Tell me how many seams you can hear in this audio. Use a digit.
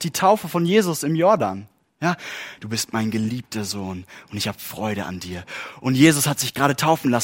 1